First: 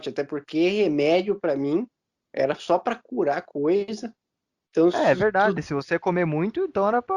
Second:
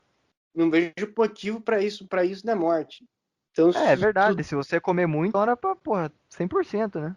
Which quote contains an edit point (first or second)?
second